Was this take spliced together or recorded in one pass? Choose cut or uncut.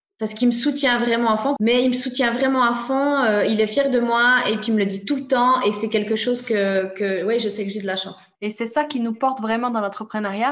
cut